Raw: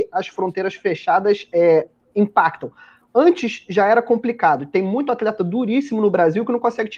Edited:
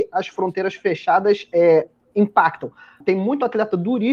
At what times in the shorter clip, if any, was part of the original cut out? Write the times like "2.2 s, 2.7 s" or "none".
3.0 s